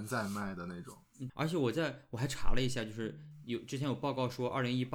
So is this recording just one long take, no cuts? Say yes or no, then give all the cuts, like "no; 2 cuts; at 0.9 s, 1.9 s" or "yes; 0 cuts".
no; 1 cut; at 1.3 s